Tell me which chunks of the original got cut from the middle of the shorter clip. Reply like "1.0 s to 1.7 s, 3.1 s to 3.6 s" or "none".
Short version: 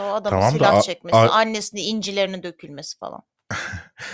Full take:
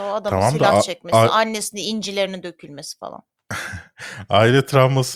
none